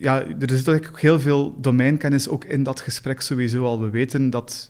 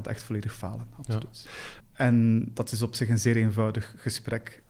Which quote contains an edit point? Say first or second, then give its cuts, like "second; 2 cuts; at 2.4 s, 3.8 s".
second; 1 cut; at 1.8 s